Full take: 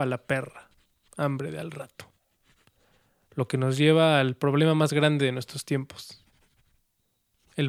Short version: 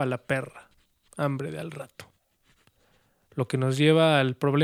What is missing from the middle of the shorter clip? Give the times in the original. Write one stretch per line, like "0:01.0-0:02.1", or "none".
none